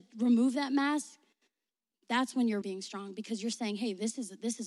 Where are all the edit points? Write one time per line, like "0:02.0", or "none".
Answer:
0:02.6